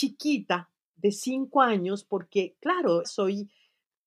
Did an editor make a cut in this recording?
yes; 1 cut; at 3.0 s

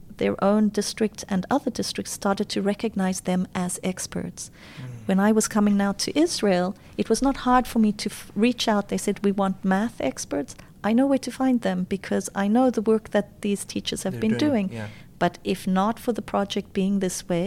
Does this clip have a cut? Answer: no; 0 cuts

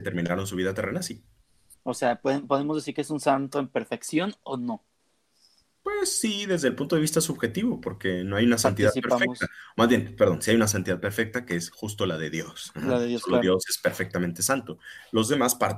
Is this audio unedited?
yes; 0 cuts

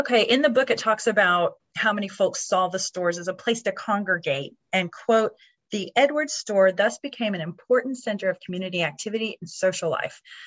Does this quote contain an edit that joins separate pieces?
no; 0 cuts

